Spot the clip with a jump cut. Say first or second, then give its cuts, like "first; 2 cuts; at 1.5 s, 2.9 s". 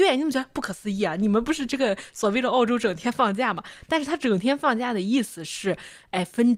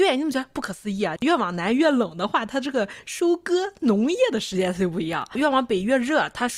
second; 1 cut; at 1.2 s